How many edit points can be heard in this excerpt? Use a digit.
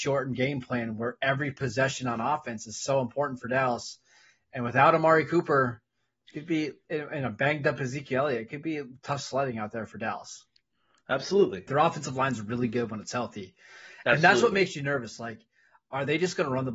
1